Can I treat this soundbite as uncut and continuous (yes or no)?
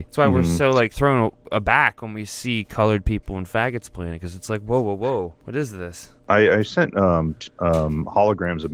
no